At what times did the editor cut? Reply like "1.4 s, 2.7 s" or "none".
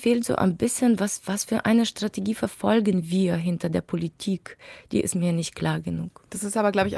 none